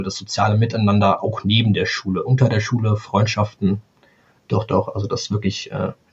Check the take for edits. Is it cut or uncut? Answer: uncut